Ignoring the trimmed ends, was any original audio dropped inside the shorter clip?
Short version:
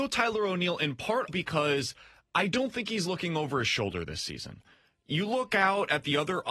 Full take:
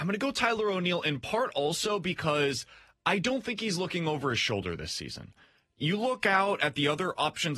yes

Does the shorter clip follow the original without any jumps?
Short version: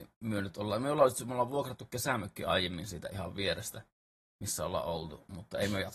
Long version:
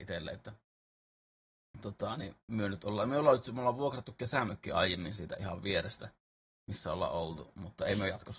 yes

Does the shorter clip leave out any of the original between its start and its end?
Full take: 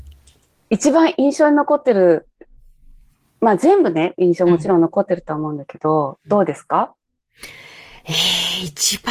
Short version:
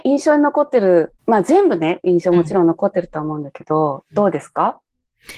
yes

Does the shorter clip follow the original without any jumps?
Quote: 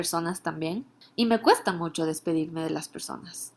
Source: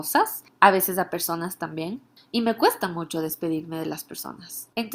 yes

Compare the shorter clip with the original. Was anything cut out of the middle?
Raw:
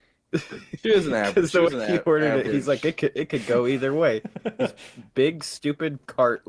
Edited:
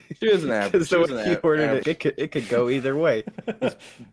yes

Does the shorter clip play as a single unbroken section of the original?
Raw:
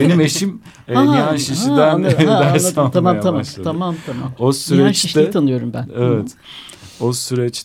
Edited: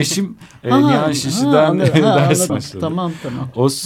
no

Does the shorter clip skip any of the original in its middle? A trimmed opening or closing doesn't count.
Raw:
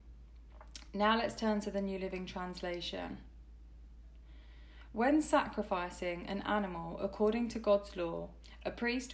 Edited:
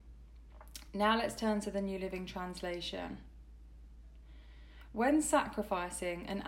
no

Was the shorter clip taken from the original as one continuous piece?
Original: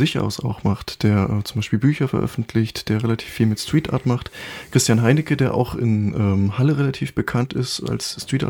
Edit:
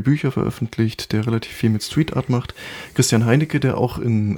yes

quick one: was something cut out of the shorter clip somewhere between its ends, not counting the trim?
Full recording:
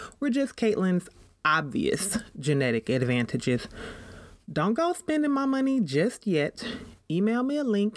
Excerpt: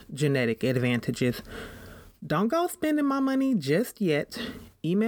no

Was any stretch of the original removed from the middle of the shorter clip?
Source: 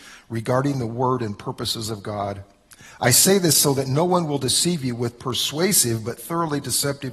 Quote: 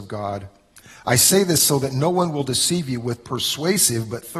no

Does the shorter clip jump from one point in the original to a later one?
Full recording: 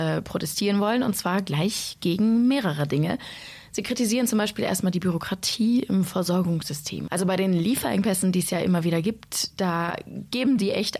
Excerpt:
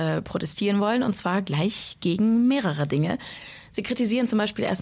no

